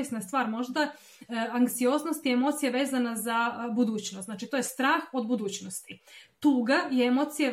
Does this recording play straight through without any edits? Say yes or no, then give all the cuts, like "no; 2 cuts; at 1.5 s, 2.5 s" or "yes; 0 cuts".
yes; 0 cuts